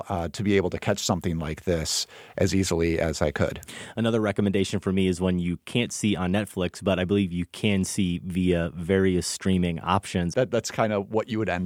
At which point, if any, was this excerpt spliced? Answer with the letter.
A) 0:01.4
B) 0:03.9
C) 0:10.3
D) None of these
C